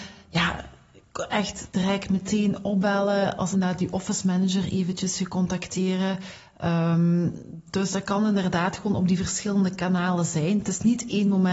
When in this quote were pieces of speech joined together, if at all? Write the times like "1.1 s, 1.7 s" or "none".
3.5 s